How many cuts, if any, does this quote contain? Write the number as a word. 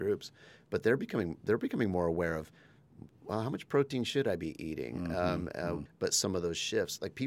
one